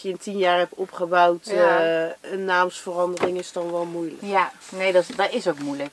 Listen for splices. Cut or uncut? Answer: uncut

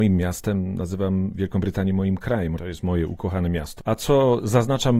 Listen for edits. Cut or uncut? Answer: cut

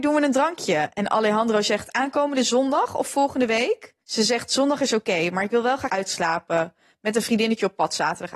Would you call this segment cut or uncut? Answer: cut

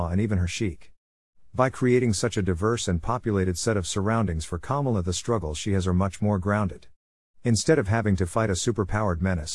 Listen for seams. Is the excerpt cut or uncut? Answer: uncut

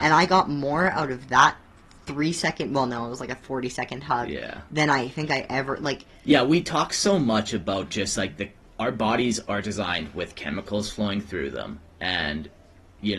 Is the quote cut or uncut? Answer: uncut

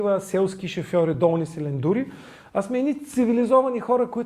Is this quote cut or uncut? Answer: uncut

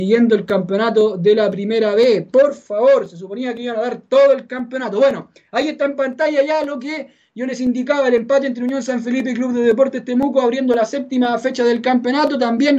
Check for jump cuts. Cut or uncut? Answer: uncut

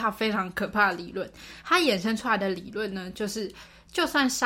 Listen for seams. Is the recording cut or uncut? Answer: uncut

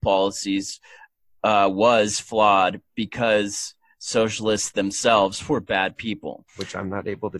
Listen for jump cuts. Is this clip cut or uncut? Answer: cut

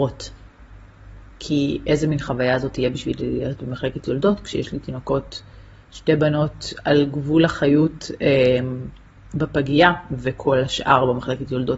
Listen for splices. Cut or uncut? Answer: cut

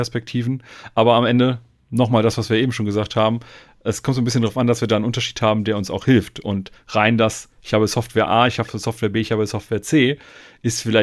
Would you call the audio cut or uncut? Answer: uncut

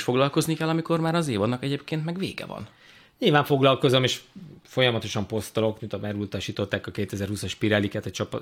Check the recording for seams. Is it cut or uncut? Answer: cut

